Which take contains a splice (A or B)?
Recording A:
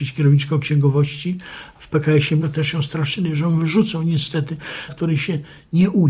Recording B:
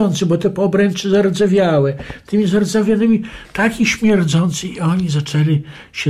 A